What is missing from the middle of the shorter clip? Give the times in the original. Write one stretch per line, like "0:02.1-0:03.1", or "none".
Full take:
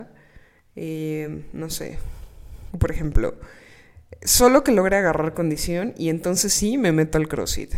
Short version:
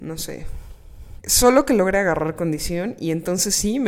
0:02.7-0:04.2